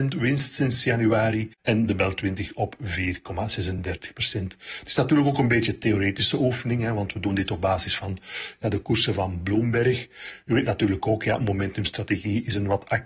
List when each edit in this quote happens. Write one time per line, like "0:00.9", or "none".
none

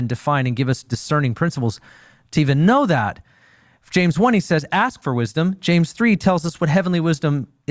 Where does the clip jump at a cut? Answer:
none

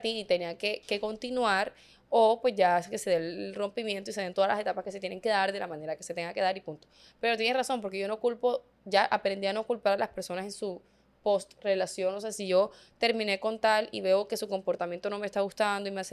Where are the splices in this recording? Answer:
none

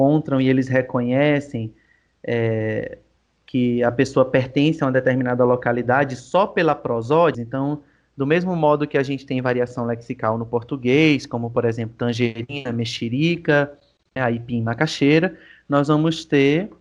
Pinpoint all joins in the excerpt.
0:07.3
0:14.2

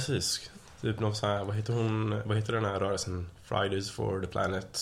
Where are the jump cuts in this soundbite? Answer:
none

